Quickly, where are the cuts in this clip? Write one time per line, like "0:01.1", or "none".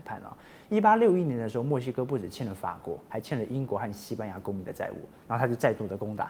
none